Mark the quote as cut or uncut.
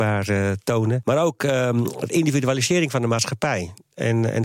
uncut